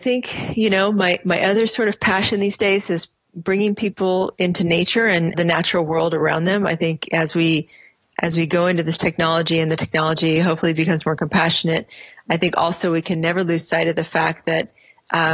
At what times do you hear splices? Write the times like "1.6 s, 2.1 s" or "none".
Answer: 5.3 s